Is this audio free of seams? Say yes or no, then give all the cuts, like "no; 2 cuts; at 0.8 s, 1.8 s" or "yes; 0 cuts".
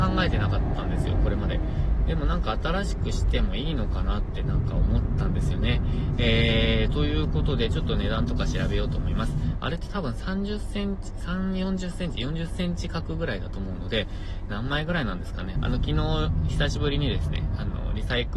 no; 2 cuts; at 9.5 s, 15.5 s